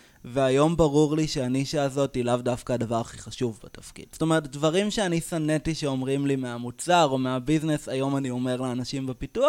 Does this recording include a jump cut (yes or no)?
yes